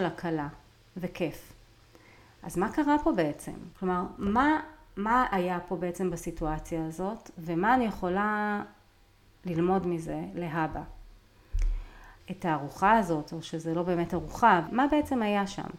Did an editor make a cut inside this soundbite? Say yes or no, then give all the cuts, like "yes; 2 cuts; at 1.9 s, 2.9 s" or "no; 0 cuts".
yes; 3 cuts; at 3.7 s, 12.2 s, 14.7 s